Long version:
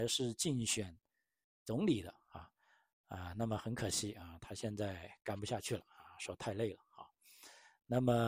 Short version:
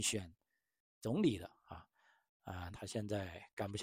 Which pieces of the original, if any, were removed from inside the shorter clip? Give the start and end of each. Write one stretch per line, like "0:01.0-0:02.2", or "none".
0:03.3-0:04.4

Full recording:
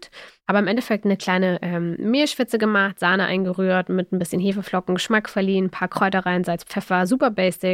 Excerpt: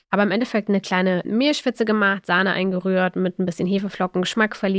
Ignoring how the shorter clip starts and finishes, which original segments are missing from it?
0:01.6-0:02.0

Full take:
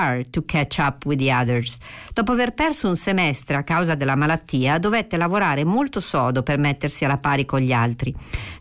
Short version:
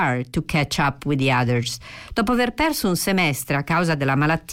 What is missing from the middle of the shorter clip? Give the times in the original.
none

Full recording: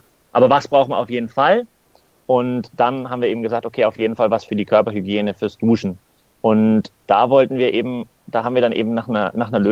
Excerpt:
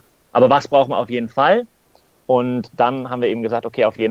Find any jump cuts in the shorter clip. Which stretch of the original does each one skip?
none

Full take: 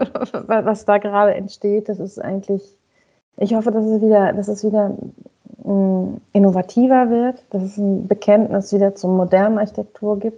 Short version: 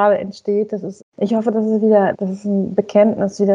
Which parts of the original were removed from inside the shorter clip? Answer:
0:02.1-0:03.2
0:04.3-0:07.4

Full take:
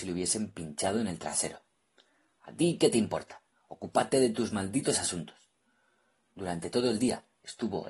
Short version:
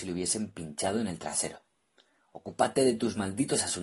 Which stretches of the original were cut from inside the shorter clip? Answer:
0:02.2-0:03.6

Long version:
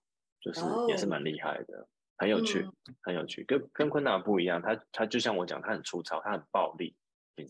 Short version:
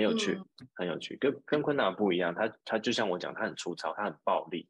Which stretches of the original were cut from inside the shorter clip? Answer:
none

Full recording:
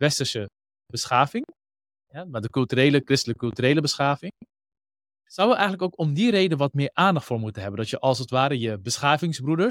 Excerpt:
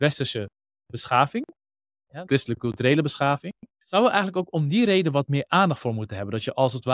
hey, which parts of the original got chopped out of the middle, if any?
0:02.3-0:03.0
0:04.5-0:05.1

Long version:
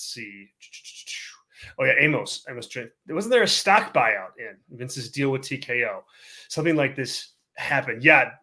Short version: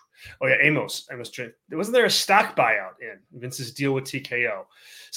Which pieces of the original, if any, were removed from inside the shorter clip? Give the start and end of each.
none

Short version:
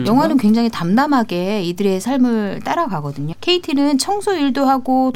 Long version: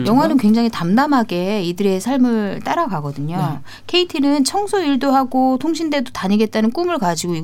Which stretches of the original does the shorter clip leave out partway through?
0:03.3-0:03.8

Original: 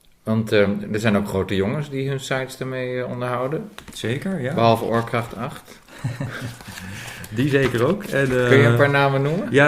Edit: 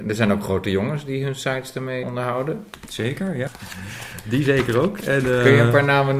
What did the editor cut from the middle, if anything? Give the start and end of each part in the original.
0:02.9-0:03.1
0:04.5-0:06.5

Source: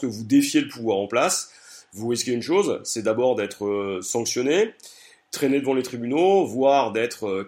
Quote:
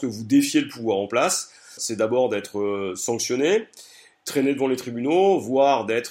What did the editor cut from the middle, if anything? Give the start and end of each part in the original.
0:01.8-0:02.8

